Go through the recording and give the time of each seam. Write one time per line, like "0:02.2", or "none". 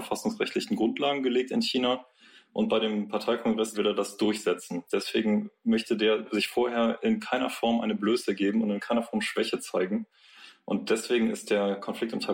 0:03.7